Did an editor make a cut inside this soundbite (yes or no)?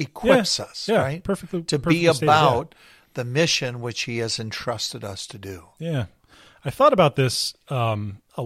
no